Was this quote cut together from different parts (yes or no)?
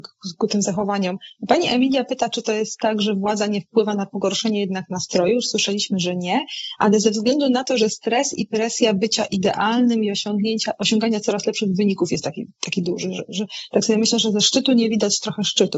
no